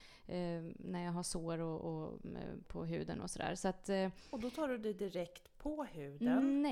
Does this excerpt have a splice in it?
yes; 1 cut; at 2.6 s

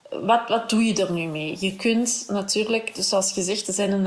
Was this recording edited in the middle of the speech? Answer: no; 0 cuts

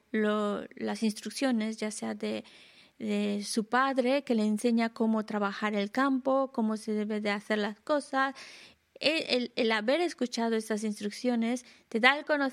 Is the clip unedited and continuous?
yes; 0 cuts

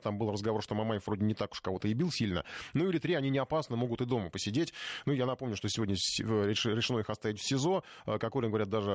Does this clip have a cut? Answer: no; 0 cuts

